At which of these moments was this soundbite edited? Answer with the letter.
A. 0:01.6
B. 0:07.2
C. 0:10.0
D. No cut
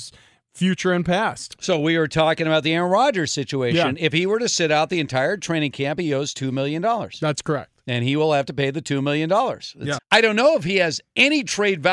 C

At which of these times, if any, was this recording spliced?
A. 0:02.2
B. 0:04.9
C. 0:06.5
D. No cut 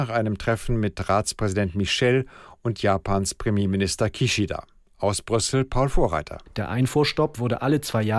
D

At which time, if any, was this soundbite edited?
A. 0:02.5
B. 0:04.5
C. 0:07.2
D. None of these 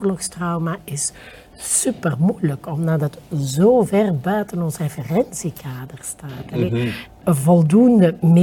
C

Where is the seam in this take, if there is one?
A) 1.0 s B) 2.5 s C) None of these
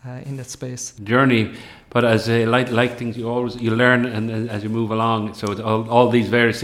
A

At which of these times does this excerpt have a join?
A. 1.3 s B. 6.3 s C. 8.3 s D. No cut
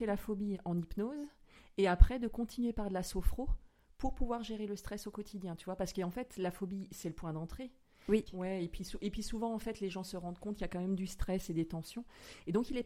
C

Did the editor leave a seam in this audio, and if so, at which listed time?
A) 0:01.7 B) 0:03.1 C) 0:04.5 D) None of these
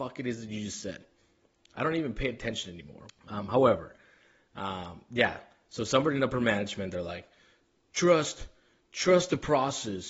B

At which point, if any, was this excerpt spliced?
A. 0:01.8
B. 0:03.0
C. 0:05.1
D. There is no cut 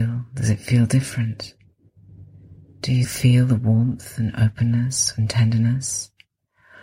B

